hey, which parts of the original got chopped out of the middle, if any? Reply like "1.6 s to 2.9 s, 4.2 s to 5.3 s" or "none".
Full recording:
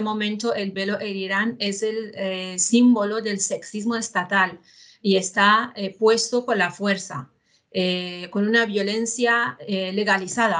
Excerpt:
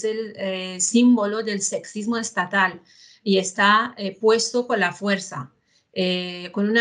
none